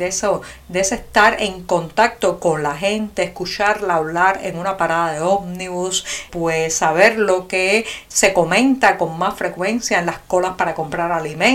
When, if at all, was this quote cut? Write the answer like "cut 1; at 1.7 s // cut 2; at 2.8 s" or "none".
cut 1; at 6.3 s